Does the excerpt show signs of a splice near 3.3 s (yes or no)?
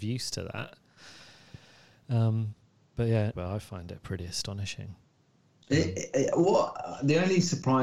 yes